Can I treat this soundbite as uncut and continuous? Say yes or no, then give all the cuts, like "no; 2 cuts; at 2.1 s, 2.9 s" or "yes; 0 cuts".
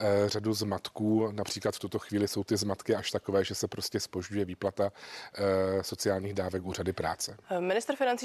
yes; 0 cuts